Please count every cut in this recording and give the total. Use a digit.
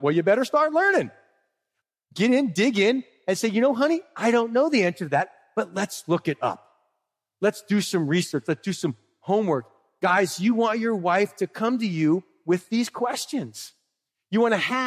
0